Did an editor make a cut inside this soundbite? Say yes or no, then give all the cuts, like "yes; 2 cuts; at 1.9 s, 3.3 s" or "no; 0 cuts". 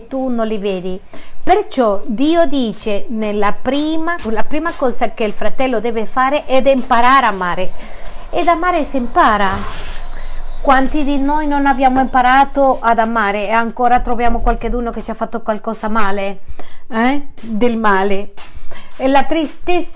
yes; 1 cut; at 4.2 s